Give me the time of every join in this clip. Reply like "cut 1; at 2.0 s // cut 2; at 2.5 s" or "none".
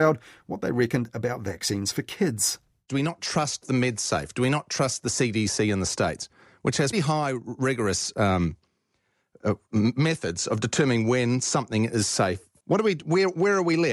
cut 1; at 6.9 s